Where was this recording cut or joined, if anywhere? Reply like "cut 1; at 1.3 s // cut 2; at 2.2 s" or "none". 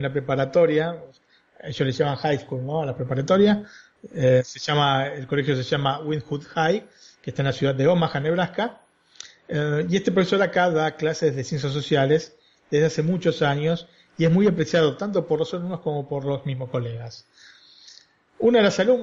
none